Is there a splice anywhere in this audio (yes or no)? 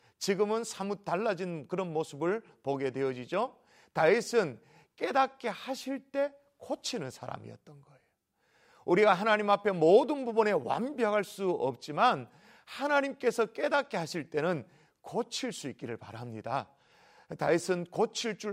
no